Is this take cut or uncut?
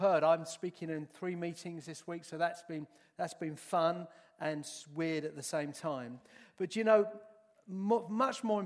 uncut